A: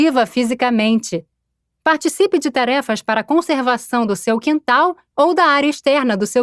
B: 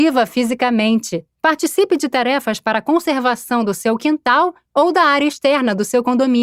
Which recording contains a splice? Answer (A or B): B